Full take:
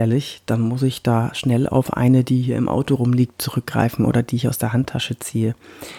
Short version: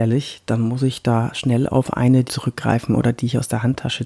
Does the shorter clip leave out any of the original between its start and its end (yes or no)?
yes